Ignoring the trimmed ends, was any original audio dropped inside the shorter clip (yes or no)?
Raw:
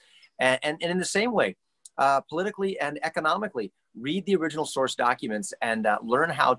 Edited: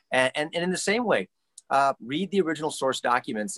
yes